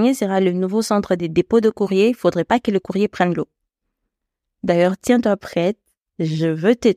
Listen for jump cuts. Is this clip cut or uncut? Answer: uncut